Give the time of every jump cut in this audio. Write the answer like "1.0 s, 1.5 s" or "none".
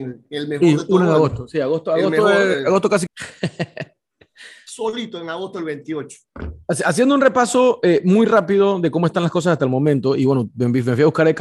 3.1 s